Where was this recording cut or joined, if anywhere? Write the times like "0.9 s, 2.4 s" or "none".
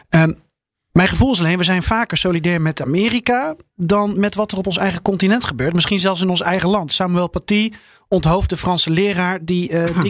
none